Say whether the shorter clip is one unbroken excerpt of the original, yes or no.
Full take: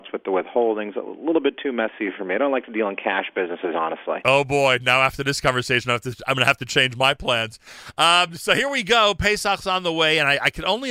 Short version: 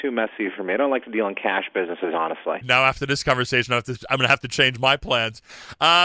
no